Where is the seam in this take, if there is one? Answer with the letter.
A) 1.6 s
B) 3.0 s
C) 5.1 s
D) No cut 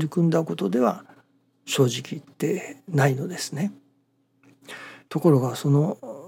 C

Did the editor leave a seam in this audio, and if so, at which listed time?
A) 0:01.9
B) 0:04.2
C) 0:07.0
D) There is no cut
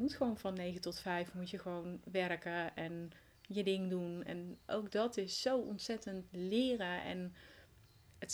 D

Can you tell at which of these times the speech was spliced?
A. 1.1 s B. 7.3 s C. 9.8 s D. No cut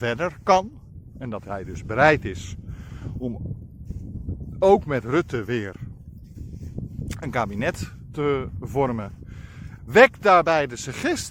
C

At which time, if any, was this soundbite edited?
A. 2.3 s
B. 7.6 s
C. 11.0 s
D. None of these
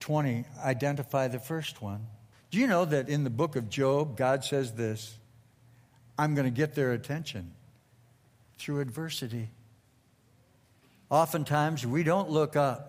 A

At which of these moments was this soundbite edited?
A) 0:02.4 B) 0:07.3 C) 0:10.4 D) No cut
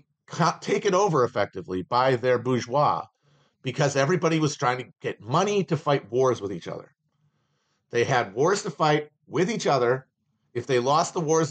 D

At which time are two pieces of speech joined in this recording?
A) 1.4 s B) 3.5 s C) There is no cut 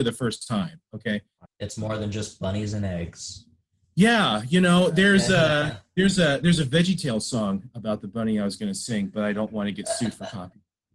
A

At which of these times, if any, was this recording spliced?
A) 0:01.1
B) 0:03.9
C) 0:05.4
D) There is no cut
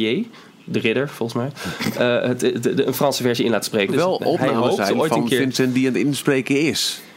B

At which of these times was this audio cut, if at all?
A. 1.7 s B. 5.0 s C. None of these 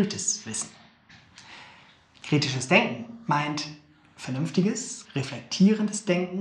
B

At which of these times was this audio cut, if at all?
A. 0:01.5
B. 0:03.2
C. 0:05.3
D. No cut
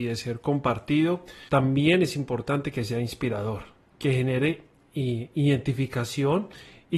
A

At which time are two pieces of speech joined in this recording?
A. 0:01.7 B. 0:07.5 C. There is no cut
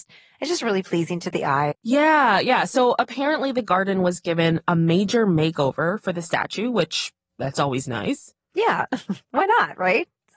A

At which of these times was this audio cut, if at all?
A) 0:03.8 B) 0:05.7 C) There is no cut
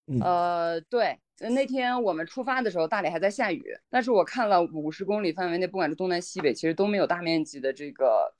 A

